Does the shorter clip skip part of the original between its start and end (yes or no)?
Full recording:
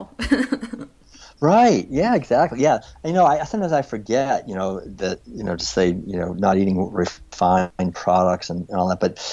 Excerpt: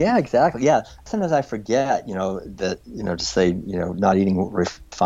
yes